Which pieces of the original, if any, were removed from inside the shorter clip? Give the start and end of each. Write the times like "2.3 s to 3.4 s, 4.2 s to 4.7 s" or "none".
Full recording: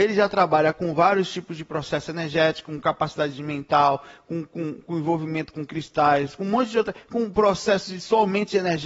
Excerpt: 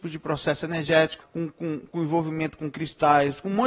2.7 s to 4.2 s